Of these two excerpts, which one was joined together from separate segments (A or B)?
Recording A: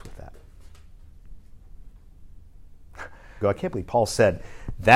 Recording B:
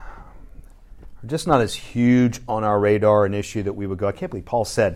A